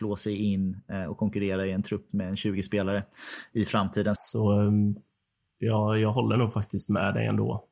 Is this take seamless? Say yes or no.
no